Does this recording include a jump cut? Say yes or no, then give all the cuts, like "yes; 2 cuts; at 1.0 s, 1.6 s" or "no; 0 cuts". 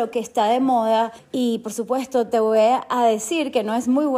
yes; 1 cut; at 1.2 s